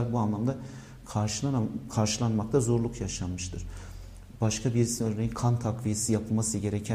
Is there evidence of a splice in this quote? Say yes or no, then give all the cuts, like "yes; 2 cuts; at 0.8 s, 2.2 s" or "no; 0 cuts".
no; 0 cuts